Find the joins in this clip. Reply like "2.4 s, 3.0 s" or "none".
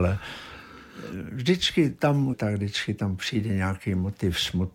2.3 s